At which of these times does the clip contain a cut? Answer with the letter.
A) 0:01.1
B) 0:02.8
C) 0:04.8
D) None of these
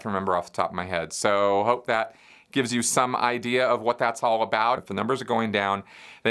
C